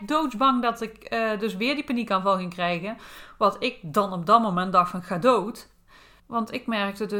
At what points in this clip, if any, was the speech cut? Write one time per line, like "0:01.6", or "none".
0:06.2